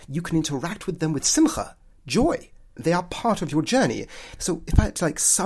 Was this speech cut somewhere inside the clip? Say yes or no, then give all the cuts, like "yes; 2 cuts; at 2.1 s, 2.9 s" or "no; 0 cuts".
yes; 2 cuts; at 2.8 s, 4.4 s